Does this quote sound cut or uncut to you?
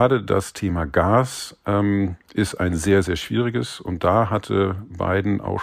uncut